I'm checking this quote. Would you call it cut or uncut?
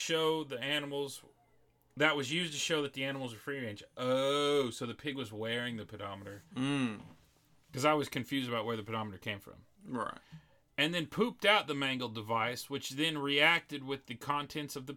uncut